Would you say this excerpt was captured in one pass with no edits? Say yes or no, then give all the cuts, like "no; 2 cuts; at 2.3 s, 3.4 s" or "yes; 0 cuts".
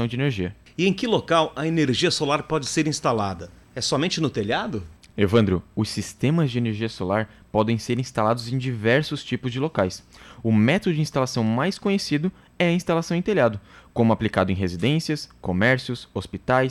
yes; 0 cuts